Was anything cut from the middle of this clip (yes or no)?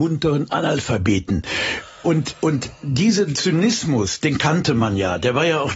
no